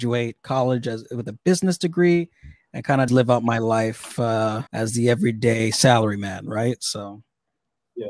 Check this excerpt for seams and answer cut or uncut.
cut